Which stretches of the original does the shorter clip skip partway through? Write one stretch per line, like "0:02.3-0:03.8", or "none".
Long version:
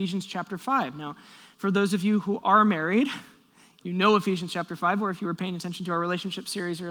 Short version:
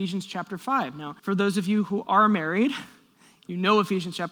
0:01.2-0:01.6

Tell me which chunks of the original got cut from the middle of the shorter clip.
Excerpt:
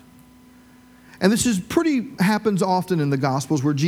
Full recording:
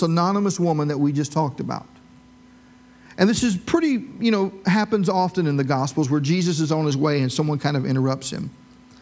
0:04.1-0:04.6

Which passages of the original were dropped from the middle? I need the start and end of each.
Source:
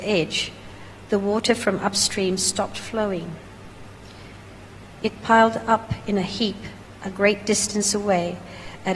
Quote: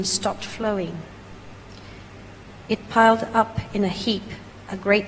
none

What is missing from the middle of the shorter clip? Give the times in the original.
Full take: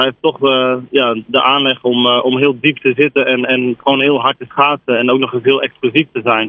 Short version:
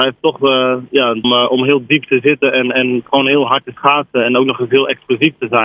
0:01.2-0:02.0

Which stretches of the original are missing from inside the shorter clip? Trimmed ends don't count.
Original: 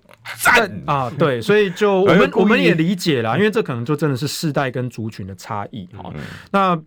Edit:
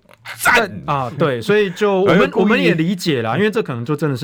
none

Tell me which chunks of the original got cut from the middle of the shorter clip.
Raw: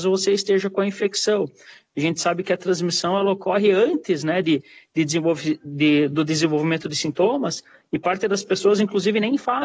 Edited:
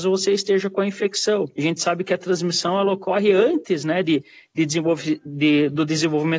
0:01.5-0:01.9

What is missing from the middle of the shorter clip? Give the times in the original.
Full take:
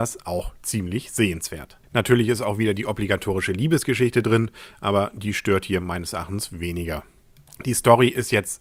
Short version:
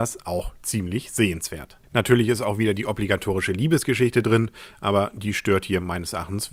none

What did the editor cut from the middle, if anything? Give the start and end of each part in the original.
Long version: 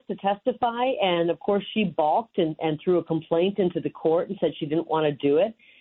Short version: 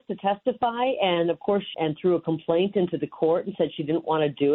0:01.7-0:02.6

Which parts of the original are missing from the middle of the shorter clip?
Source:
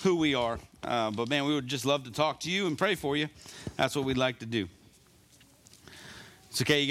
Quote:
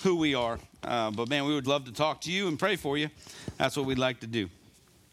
0:01.6-0:01.8

